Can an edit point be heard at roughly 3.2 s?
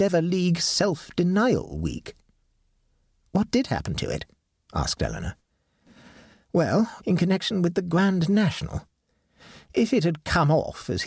no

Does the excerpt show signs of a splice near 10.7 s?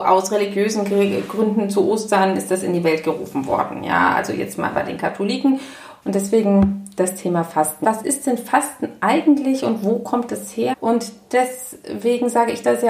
yes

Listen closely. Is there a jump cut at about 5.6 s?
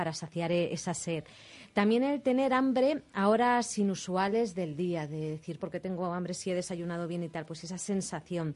yes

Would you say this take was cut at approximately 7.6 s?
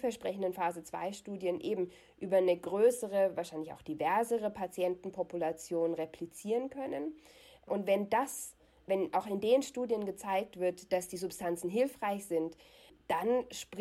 no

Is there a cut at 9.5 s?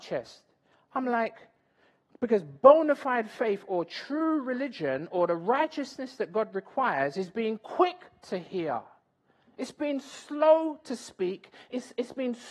no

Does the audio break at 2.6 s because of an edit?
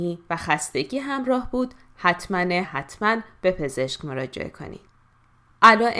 yes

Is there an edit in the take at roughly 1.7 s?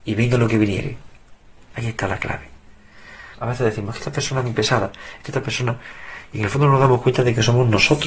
yes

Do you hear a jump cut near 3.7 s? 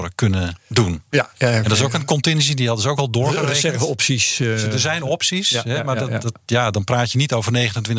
no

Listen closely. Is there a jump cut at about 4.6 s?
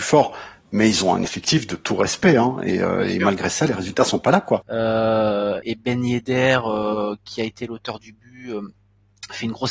yes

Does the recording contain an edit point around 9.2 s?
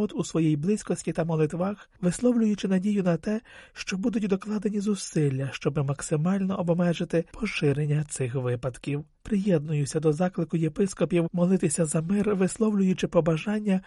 yes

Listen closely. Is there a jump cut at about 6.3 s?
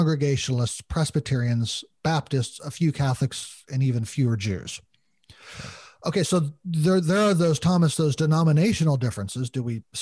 yes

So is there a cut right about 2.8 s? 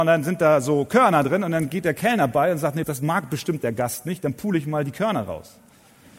yes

